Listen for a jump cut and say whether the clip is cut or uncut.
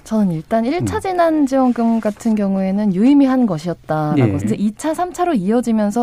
cut